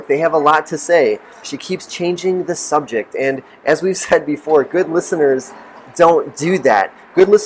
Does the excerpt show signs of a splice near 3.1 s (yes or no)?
no